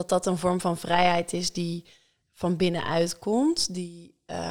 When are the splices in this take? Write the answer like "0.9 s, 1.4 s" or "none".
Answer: none